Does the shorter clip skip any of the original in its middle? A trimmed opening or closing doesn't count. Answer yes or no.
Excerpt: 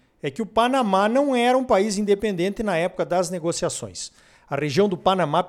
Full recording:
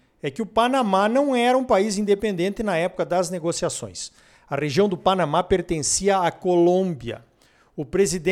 no